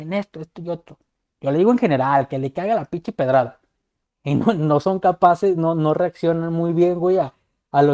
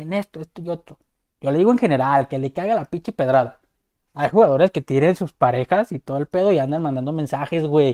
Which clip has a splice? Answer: first; 1 cut; at 4.0 s

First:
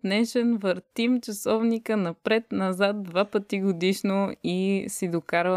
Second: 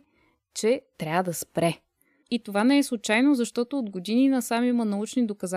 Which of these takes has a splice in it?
second; 1 cut; at 2.2 s

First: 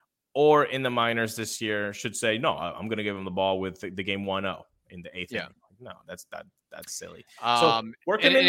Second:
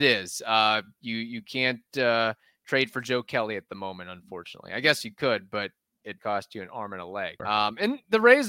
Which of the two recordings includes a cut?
second; 2 cuts; at 6.2 s, 7.4 s

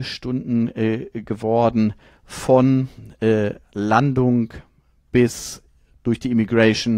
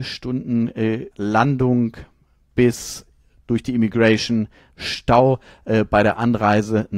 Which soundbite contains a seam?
second; 2 cuts; at 1.1 s, 4.7 s

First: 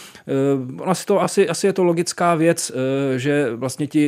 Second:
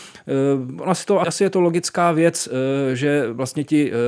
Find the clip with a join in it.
second; 1 cut; at 1.2 s

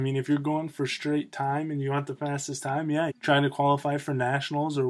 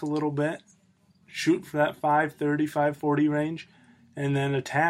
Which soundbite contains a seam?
first; 1 cut; at 3.1 s

